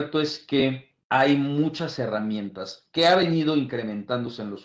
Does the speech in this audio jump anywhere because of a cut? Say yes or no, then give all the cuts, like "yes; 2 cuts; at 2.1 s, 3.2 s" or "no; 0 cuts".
yes; 1 cut; at 1.0 s